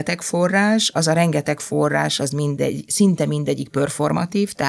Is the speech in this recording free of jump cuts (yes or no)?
yes